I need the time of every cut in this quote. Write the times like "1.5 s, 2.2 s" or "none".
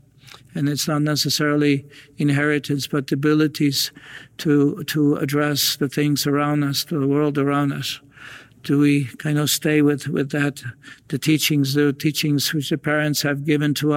none